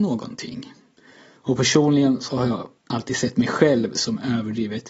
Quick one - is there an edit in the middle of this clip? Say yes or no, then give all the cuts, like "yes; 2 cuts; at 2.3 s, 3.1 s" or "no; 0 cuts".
yes; 2 cuts; at 1.4 s, 2.8 s